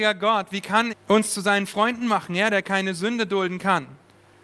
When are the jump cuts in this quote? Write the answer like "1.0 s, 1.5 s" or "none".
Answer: 0.9 s